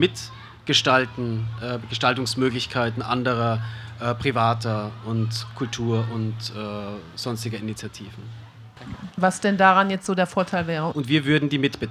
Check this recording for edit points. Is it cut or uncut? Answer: cut